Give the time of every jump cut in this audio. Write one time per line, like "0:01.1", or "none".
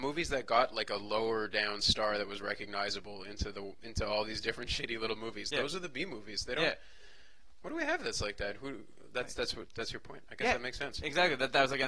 none